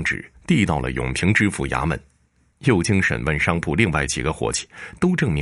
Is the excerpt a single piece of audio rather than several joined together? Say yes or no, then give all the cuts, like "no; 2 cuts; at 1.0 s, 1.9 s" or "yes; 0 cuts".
no; 1 cut; at 2.5 s